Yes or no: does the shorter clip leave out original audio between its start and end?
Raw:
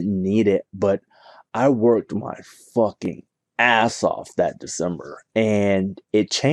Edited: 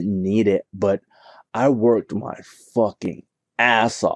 no